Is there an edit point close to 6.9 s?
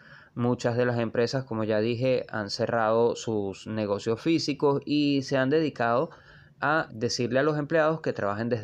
yes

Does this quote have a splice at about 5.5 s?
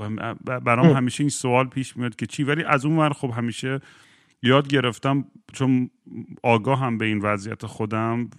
yes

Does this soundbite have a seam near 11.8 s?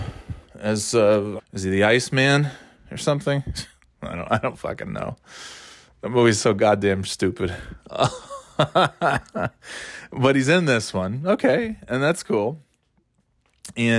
no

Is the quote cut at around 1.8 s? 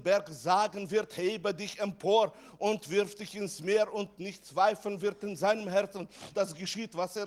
no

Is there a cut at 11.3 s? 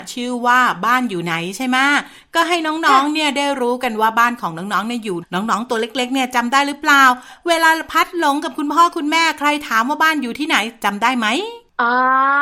no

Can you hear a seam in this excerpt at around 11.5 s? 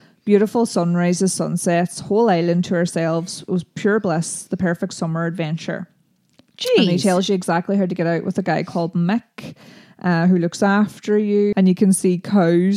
yes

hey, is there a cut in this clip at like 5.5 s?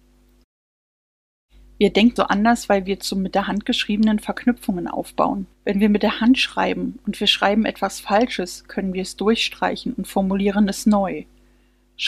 yes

